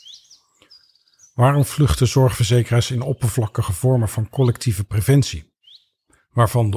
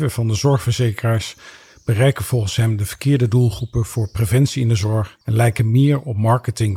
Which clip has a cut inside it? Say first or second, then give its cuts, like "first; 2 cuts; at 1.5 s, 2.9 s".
second; 1 cut; at 5.2 s